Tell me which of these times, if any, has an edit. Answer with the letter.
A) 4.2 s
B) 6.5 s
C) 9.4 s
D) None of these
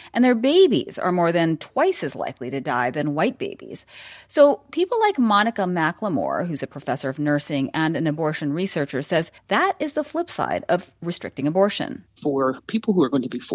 C